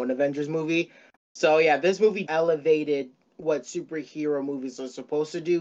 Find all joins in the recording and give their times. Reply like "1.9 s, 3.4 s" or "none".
1.1 s, 2.3 s

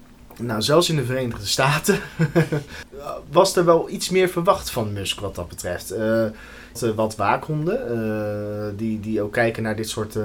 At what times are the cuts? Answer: 6.8 s

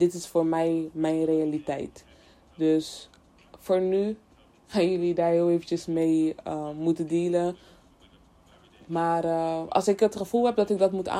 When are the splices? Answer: none

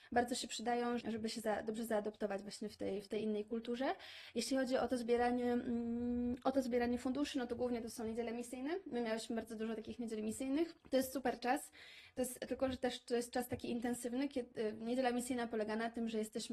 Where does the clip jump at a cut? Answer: 1.0 s, 10.8 s

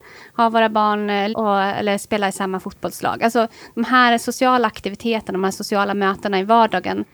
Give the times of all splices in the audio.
1.3 s

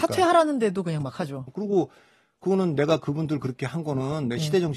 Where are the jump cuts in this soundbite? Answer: 1.5 s

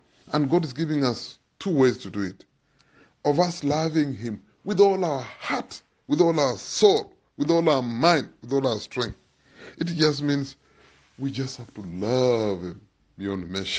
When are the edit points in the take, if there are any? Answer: none

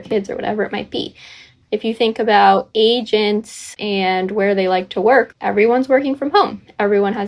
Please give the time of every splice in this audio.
1.6 s, 5.3 s

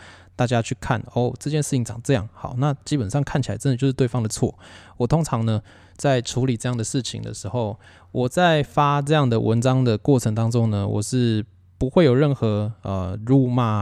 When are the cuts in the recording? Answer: 7.9 s

